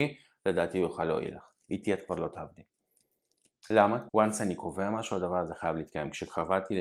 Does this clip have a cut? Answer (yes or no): yes